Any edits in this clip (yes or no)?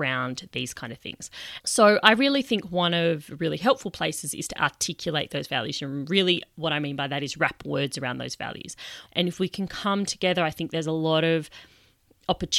yes